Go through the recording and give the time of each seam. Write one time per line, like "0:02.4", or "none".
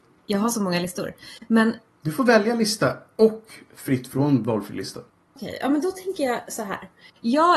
none